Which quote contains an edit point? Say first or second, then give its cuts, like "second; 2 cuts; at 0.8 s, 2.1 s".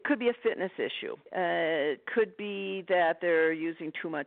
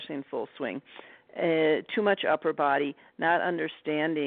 first; 1 cut; at 1.2 s